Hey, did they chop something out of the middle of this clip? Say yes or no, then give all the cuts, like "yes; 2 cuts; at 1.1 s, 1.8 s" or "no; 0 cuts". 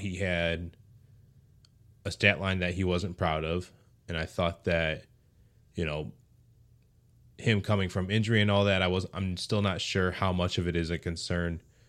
no; 0 cuts